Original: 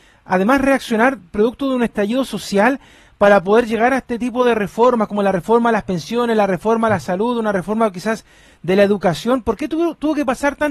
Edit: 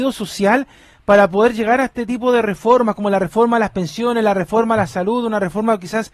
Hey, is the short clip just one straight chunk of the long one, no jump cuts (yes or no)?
yes